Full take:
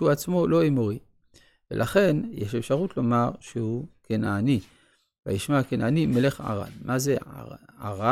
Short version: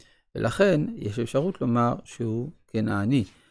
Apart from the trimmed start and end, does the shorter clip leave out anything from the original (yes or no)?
no